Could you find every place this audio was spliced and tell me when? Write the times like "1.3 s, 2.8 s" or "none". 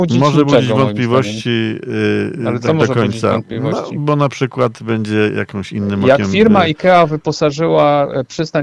none